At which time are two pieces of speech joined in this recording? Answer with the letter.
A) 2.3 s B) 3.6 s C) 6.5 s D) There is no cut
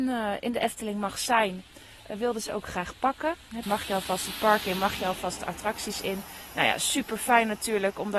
B